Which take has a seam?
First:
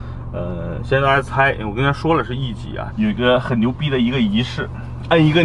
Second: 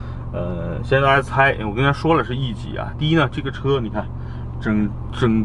first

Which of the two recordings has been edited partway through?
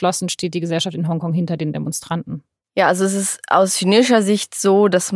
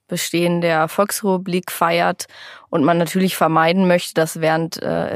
first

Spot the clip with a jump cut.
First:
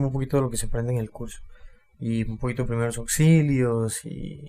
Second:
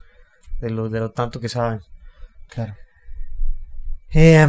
second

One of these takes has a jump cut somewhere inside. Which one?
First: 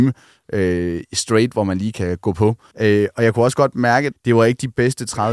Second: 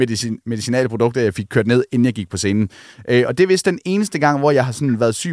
first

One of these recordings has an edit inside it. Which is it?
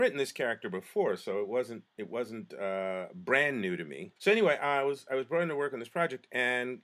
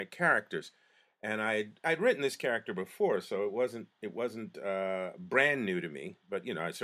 first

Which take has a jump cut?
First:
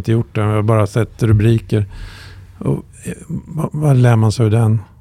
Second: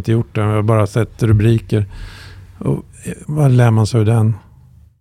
second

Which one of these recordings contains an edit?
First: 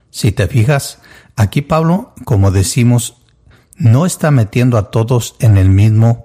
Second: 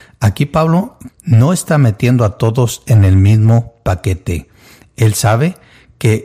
second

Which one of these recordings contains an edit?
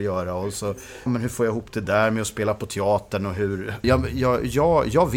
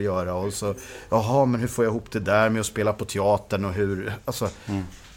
first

